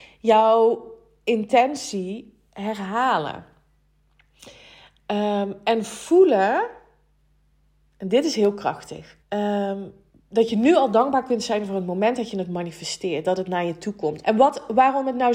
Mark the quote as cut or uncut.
cut